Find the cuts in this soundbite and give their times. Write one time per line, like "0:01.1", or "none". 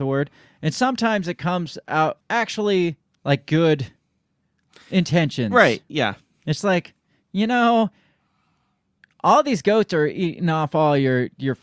0:02.2